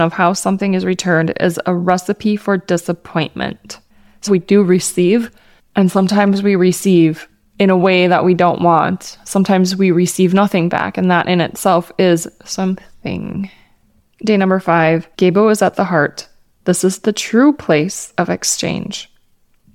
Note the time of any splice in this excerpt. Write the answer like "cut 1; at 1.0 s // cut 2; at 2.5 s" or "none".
cut 1; at 4.3 s // cut 2; at 15.1 s